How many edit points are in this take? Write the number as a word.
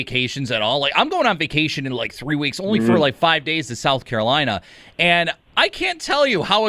zero